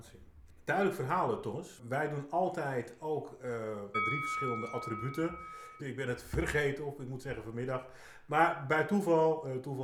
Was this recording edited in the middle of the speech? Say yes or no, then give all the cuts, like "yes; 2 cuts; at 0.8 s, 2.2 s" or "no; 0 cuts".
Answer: yes; 2 cuts; at 3.9 s, 5.8 s